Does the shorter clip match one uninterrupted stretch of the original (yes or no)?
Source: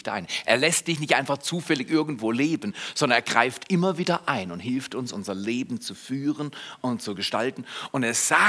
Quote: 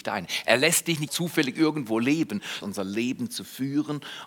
no